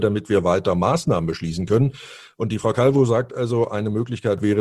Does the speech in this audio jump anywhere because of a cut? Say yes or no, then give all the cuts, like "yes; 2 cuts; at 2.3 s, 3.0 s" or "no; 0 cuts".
no; 0 cuts